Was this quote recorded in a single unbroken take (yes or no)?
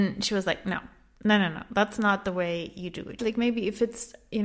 no